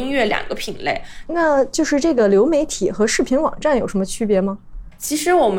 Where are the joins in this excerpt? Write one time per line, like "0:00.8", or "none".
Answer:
0:01.3